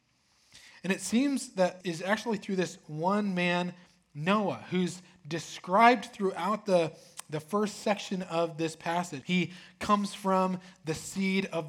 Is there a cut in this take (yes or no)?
yes